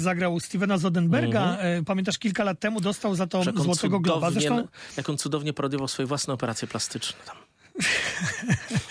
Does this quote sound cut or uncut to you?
uncut